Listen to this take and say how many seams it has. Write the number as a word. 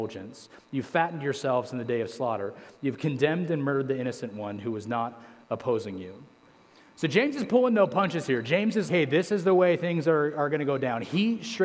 one